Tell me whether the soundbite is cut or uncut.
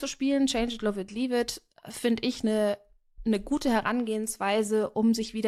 uncut